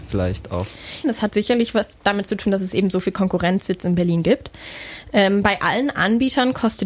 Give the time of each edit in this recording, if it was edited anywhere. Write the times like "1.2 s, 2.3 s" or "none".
1.0 s